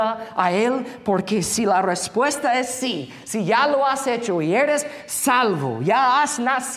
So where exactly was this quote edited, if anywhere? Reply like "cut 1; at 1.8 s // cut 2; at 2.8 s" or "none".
none